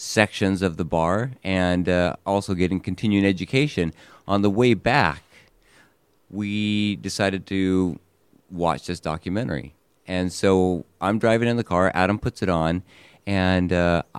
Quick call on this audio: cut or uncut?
uncut